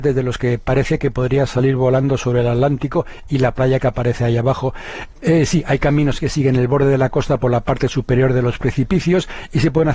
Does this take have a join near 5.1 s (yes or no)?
yes